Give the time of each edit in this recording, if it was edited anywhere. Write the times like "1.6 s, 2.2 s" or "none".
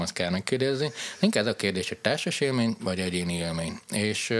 none